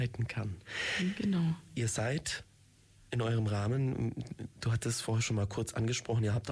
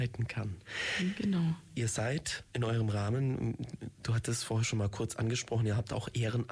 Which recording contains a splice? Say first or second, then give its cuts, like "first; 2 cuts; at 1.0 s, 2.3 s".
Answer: second; 1 cut; at 2.5 s